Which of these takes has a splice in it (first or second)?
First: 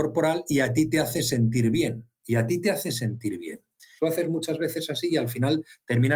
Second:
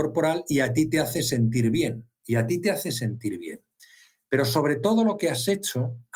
first